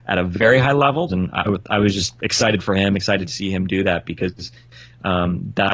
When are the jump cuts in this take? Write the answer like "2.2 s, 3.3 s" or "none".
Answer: 1.1 s

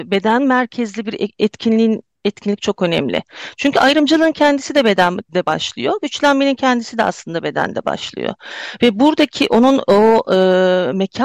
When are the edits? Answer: none

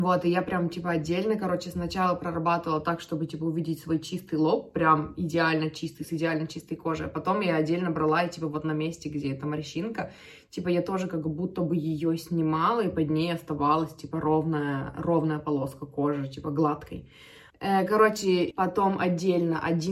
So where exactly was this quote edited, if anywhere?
17.5 s, 18.5 s

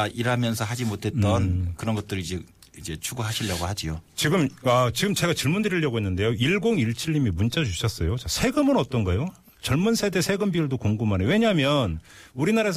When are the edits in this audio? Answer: none

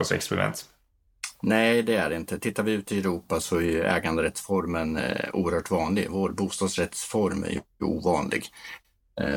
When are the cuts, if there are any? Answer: none

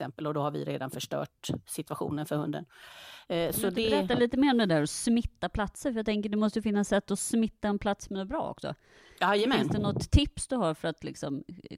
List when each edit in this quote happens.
none

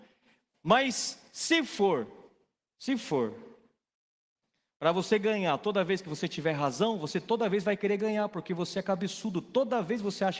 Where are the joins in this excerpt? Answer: none

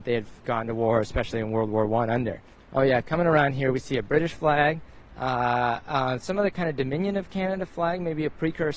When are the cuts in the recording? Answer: 2.5 s, 5.0 s

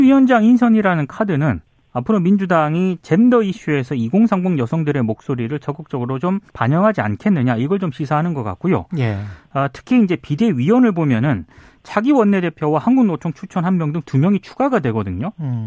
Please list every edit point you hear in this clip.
6.5 s

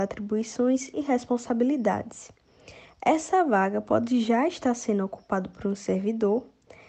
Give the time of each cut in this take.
none

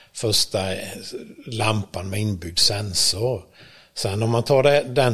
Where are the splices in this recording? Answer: none

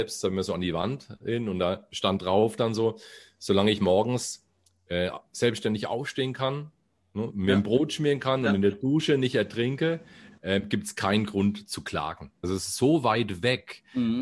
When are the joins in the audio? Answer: 7.3 s, 12.4 s

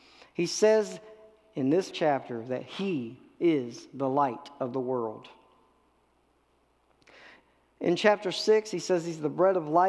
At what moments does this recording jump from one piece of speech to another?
1.9 s

